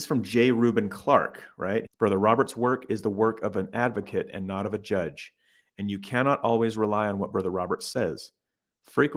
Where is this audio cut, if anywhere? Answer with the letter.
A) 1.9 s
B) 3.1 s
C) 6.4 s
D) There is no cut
A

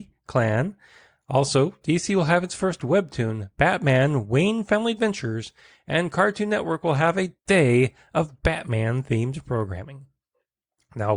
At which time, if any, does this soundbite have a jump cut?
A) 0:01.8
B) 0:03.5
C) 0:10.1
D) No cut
D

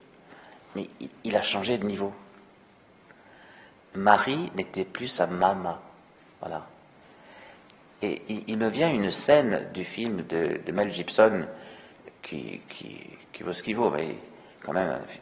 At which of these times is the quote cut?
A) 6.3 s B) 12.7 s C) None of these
A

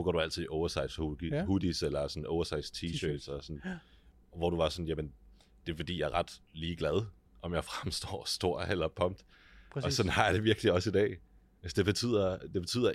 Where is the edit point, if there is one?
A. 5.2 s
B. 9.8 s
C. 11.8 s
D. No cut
D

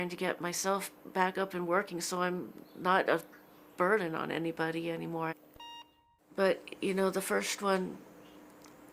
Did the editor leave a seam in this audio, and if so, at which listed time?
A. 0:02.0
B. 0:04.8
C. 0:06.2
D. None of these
C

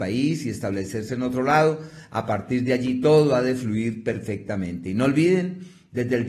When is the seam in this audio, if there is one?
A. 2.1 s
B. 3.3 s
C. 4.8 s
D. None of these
D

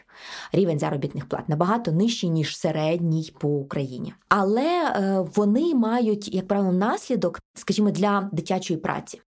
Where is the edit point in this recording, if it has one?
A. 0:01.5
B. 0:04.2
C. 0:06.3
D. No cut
D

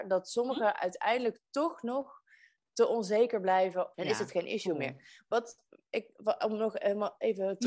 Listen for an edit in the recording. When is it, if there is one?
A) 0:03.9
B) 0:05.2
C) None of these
A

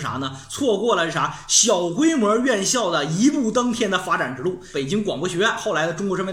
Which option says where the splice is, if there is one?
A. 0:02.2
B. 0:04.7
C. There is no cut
B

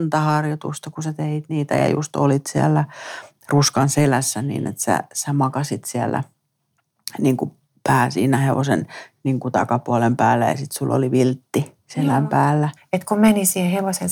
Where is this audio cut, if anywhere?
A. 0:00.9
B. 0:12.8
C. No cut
B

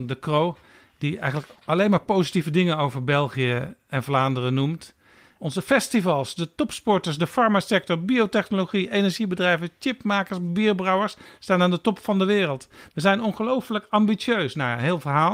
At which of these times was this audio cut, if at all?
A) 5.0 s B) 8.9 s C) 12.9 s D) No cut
D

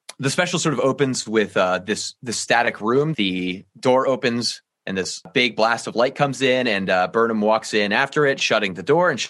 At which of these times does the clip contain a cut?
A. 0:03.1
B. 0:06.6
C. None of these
A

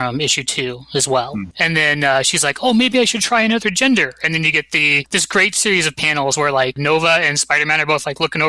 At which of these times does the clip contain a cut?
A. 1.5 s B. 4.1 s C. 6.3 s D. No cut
A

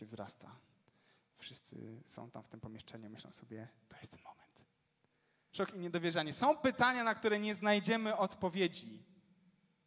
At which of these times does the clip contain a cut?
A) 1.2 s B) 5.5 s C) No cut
B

